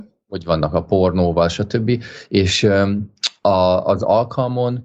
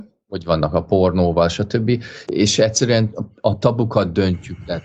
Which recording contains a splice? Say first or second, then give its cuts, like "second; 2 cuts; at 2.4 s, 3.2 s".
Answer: second; 1 cut; at 2.3 s